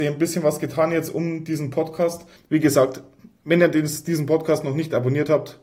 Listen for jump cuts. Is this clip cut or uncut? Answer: cut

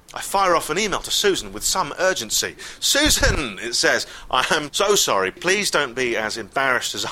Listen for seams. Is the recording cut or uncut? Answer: cut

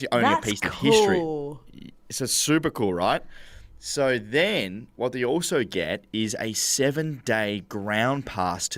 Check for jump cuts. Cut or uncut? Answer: uncut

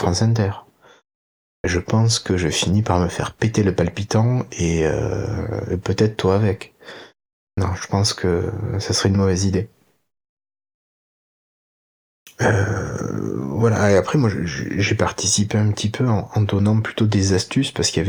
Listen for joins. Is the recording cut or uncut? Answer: uncut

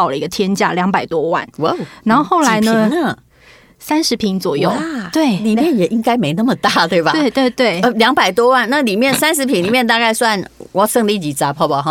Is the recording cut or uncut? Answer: uncut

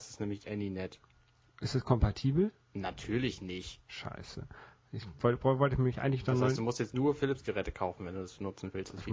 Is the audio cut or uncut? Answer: uncut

